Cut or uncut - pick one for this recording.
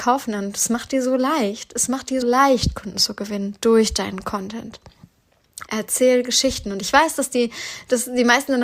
cut